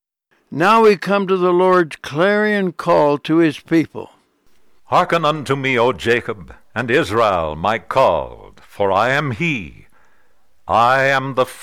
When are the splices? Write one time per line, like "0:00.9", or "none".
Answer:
none